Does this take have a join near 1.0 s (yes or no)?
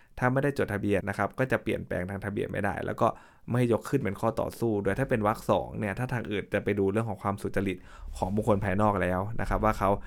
yes